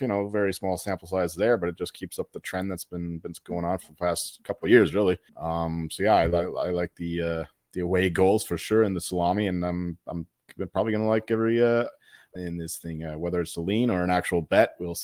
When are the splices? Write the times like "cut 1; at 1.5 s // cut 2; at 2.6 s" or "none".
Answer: cut 1; at 5.3 s // cut 2; at 12.4 s // cut 3; at 13.5 s